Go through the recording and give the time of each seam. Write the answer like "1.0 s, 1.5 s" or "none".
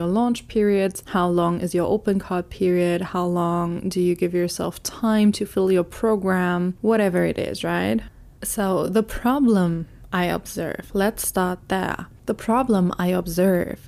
none